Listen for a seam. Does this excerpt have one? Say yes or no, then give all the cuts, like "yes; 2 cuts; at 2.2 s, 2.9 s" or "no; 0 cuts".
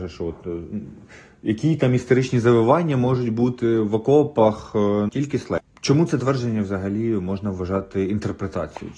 yes; 1 cut; at 5.1 s